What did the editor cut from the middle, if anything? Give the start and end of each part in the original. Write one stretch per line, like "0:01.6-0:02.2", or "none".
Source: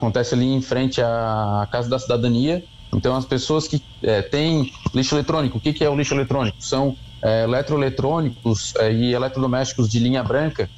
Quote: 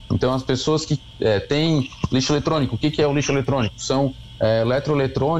none